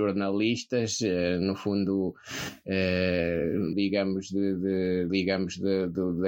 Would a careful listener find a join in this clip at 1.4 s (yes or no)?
no